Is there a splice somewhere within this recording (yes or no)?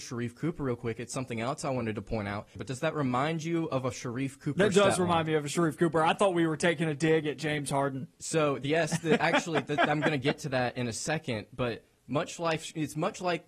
yes